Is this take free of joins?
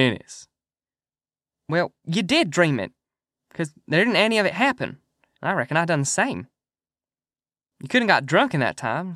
no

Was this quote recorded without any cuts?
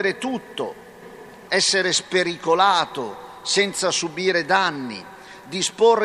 no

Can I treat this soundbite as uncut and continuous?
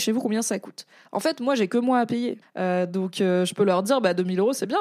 no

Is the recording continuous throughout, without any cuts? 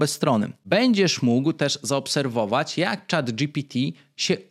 yes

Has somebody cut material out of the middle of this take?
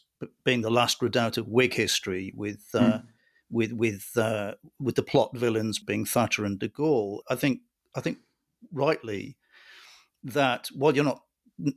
yes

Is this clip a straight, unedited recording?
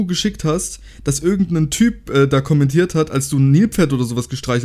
yes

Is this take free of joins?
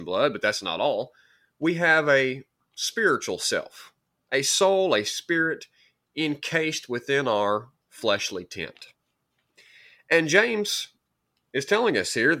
yes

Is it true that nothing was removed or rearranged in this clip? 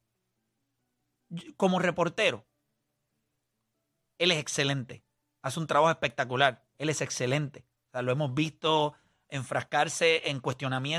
no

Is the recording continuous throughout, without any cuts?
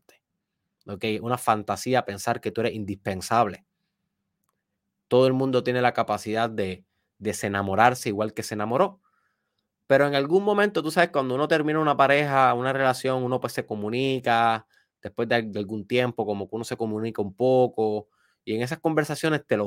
yes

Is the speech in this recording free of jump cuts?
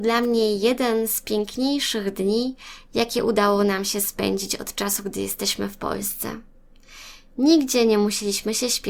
yes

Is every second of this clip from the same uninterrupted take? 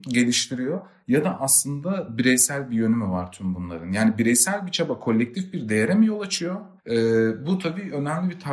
no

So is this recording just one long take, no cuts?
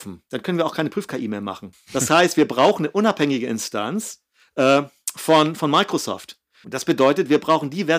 no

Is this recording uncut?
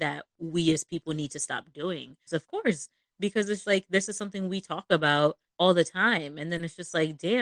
no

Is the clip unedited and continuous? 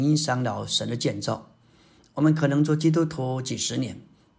yes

